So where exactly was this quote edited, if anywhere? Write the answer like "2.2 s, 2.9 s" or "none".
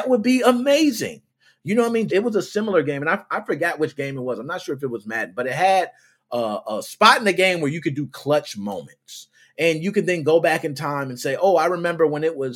2.1 s